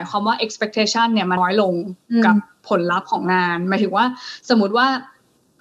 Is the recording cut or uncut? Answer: cut